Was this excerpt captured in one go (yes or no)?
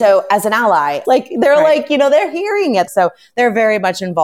no